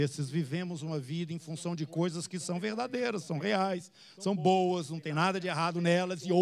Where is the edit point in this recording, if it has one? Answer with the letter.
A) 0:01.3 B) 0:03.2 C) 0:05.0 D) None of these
D